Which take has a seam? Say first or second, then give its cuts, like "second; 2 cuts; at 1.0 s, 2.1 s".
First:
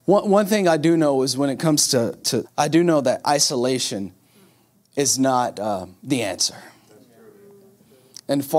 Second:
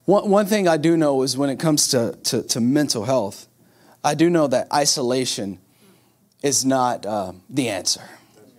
first; 1 cut; at 2.4 s